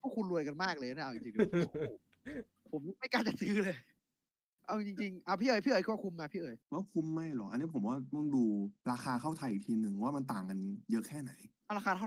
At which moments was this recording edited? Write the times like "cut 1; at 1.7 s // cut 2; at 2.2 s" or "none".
cut 1; at 6.6 s